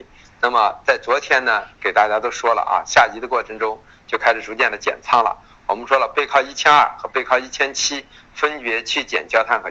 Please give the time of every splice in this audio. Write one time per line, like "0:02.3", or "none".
none